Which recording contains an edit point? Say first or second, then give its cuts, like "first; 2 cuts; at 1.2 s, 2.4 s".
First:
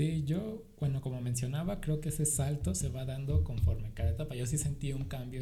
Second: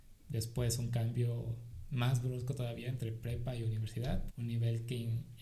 second; 1 cut; at 4.3 s